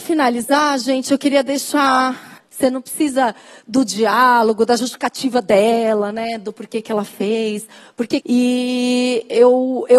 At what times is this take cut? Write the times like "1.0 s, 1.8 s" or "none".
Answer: 2.4 s, 8.2 s